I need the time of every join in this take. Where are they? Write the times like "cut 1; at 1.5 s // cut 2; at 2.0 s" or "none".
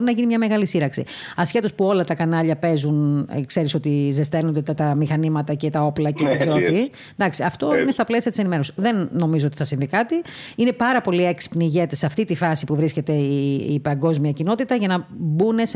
cut 1; at 1.3 s // cut 2; at 4.8 s